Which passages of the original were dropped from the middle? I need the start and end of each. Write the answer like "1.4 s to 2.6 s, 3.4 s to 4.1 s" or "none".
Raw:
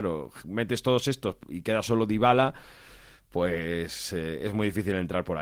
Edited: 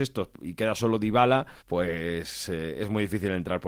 2.7 s to 3.2 s